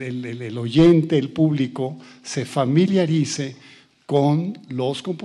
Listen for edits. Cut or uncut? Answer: uncut